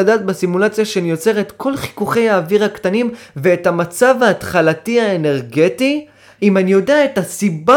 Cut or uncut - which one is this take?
cut